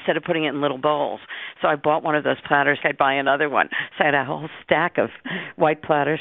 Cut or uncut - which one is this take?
cut